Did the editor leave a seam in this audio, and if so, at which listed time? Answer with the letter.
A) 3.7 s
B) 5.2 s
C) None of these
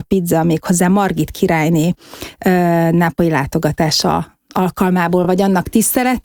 C